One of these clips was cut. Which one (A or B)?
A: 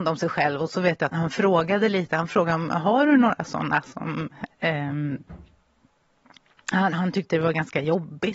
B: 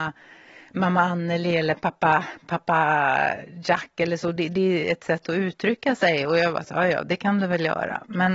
A